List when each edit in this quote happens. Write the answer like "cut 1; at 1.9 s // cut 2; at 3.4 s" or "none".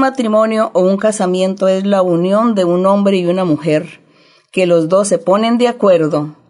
none